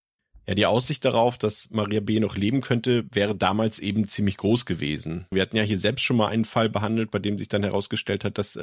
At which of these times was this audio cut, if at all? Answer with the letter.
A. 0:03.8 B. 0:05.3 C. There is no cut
B